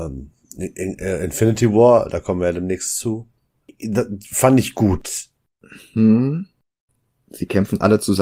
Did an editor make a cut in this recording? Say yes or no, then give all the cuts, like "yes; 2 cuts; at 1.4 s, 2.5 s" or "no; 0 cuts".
no; 0 cuts